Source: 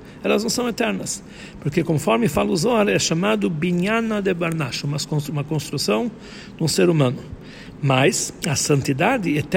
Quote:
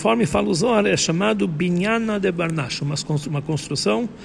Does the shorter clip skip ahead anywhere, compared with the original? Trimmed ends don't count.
no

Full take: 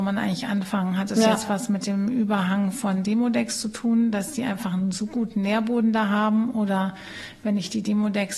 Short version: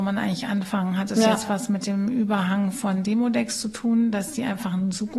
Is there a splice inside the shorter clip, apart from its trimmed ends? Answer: no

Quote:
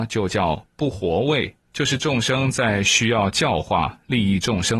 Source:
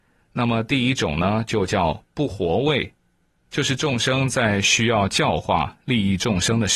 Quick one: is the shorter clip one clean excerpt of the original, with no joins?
no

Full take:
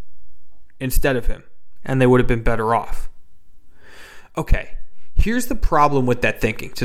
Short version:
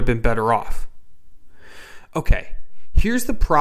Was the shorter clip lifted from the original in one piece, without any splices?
yes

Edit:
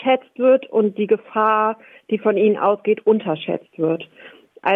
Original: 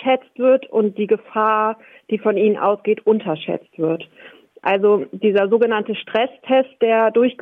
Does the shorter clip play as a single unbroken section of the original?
yes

